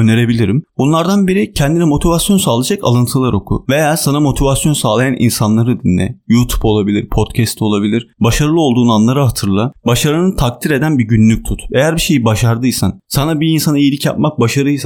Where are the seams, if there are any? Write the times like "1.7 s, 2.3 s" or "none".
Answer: 8.1 s